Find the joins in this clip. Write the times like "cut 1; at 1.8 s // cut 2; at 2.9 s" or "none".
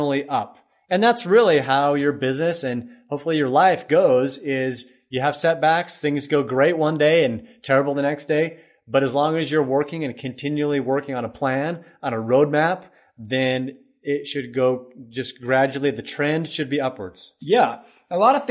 none

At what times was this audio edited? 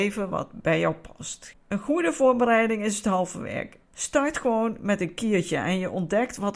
cut 1; at 1.5 s // cut 2; at 3.8 s

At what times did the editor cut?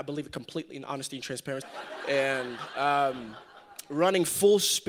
cut 1; at 1.6 s

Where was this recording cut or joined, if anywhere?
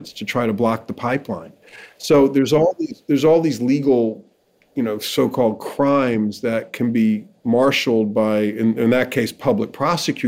none

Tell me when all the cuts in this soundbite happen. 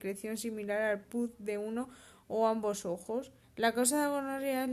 cut 1; at 3.4 s

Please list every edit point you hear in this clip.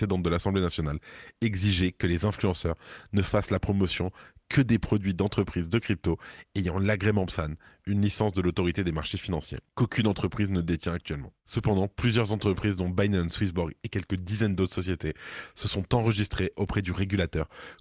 cut 1; at 9.7 s

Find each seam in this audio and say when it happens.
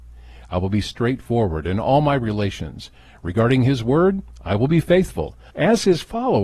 cut 1; at 5.5 s

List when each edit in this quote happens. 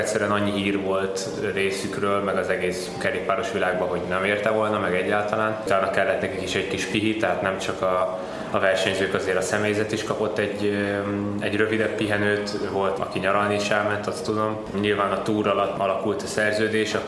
cut 1; at 13.0 s // cut 2; at 14.7 s

